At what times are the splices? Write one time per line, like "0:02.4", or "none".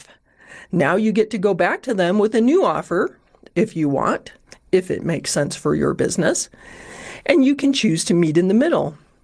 none